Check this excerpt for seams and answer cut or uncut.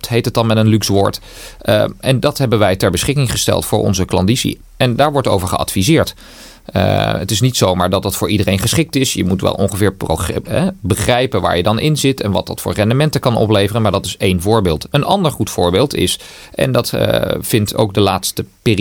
uncut